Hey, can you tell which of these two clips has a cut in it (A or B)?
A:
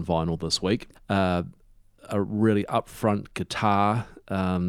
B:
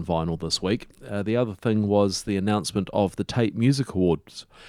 A